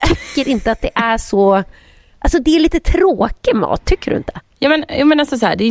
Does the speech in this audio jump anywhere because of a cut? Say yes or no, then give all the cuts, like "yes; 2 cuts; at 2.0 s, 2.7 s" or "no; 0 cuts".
no; 0 cuts